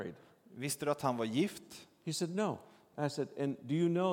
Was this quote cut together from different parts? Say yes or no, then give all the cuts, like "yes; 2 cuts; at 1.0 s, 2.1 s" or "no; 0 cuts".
yes; 1 cut; at 2.9 s